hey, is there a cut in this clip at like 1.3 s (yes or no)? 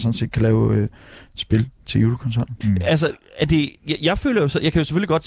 no